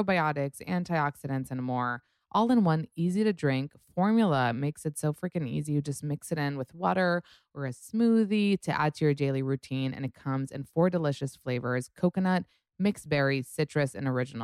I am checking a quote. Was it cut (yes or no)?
no